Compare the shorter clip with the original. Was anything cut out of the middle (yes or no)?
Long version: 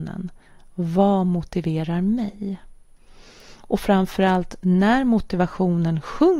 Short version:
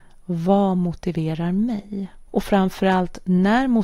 yes